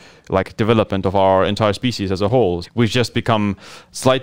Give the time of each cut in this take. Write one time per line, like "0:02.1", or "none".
0:02.6